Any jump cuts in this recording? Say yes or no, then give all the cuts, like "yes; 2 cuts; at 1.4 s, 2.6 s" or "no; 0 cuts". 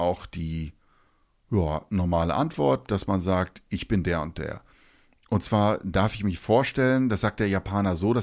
no; 0 cuts